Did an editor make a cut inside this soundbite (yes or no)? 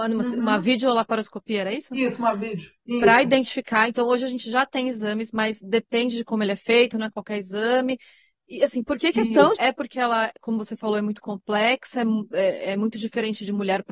yes